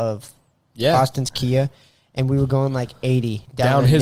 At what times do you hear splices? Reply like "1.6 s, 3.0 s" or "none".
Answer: none

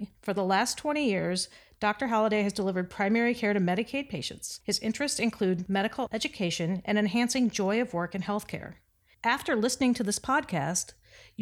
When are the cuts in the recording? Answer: 6.9 s, 9.1 s

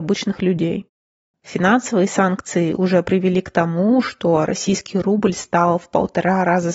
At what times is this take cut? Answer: 1.3 s

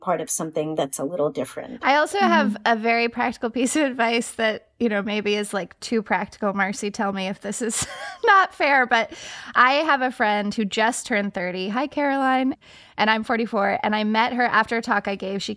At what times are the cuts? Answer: none

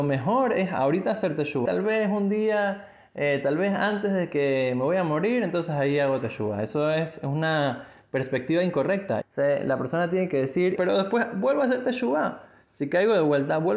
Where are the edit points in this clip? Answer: 1.6 s, 9.2 s, 10.8 s

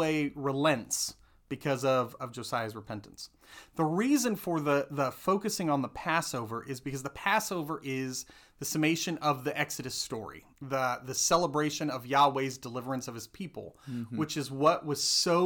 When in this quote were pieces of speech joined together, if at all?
none

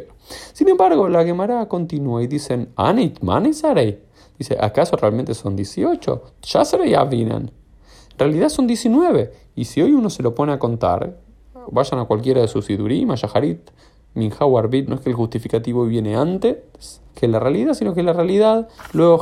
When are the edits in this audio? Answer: 14.9 s, 17.1 s

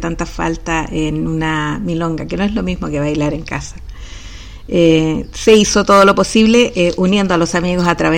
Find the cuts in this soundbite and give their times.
none

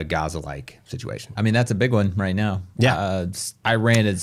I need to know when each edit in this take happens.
1.4 s

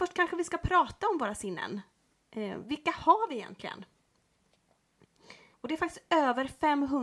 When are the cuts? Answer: 5.5 s

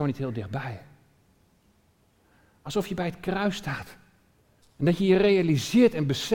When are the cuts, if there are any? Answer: 4.6 s

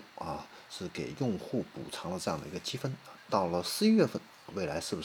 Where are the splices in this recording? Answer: none

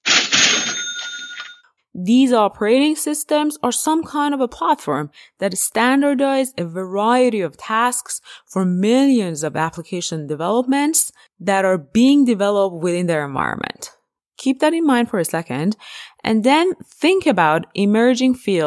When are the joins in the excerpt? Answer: 1.8 s

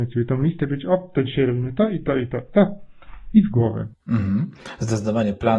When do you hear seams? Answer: none

